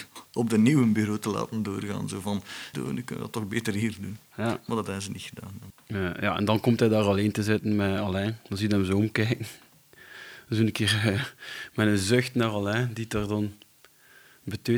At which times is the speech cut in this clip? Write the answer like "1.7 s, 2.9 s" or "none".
2.7 s

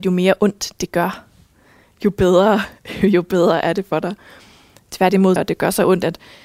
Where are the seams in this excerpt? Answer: 5.4 s

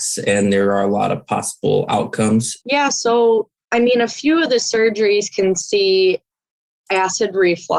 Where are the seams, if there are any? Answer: 2.6 s

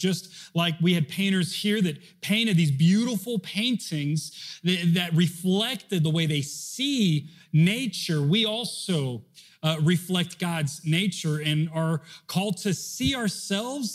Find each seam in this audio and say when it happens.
none

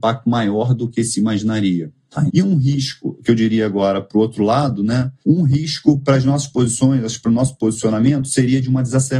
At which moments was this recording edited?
2.3 s, 5.2 s

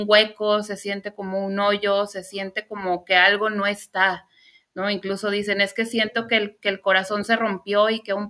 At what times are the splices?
none

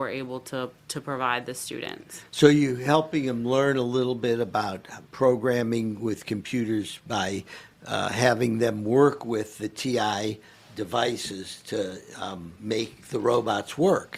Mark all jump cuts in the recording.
none

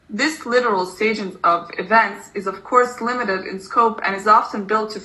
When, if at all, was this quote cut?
none

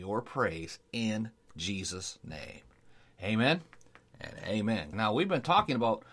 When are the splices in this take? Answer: 4.9 s

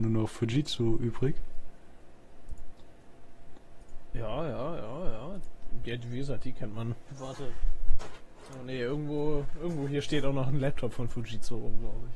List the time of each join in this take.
none

